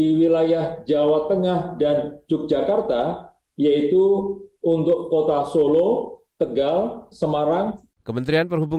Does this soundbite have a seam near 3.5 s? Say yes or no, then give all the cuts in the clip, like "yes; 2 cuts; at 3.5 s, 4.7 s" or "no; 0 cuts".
yes; 2 cuts; at 3.5 s, 7.1 s